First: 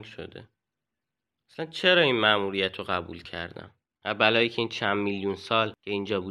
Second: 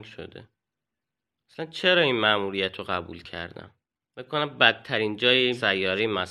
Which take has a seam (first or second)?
first